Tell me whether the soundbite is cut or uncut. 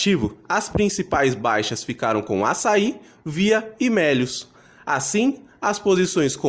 uncut